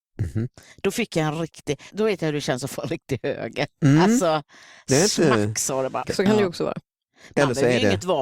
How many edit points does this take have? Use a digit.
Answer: 2